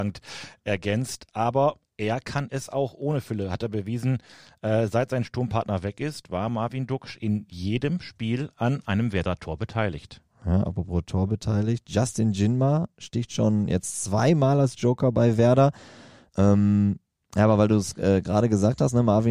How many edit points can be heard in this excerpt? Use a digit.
1